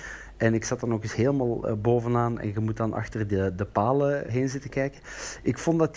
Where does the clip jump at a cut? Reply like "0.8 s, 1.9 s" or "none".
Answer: 4.3 s